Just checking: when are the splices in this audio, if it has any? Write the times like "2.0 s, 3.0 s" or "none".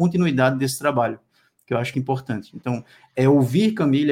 1.9 s